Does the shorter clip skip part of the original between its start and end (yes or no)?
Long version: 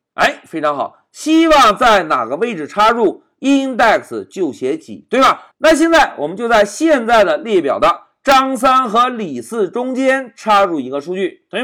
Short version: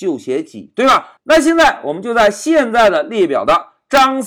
no